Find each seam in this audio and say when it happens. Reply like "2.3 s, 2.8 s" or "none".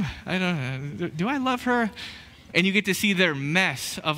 2.5 s

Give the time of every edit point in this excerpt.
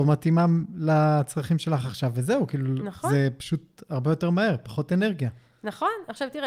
none

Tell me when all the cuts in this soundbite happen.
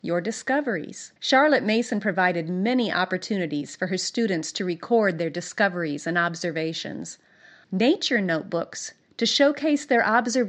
1.2 s, 7.6 s

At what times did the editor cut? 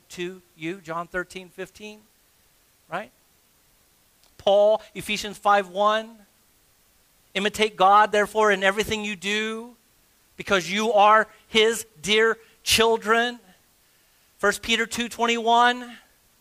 none

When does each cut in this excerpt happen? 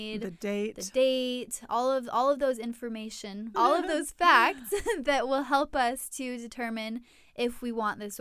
3.5 s

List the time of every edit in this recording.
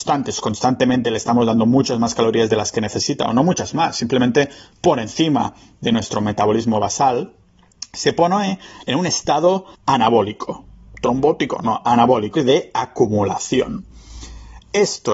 9.8 s, 12.4 s

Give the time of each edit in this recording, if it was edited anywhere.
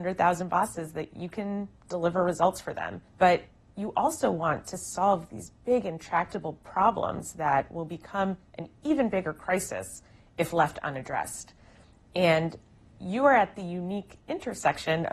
3.1 s

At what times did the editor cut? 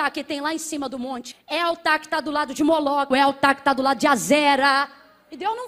1.3 s, 3.1 s

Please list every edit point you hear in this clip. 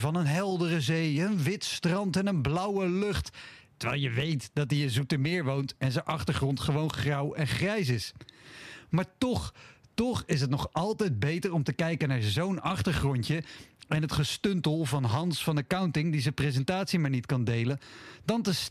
none

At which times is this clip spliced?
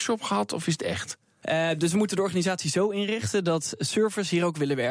1.4 s

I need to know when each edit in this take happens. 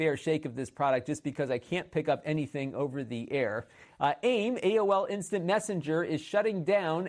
3.8 s

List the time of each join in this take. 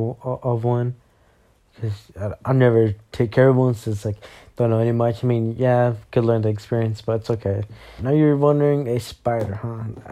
8.0 s

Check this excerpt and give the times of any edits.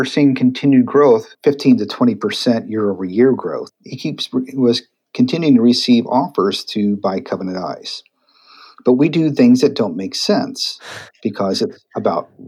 none

